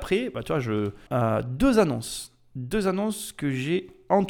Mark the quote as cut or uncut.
cut